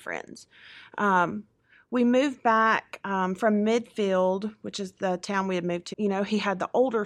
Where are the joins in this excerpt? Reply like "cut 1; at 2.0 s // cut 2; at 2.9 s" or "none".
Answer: cut 1; at 5.9 s